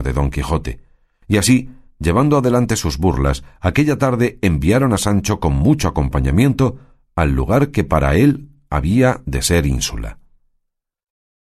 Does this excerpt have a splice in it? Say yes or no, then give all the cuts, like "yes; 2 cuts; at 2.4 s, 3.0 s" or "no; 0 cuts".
no; 0 cuts